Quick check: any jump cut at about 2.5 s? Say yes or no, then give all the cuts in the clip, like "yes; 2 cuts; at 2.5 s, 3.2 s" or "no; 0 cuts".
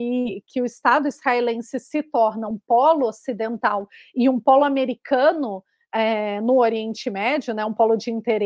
no; 0 cuts